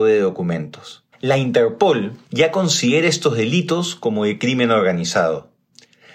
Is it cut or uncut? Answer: cut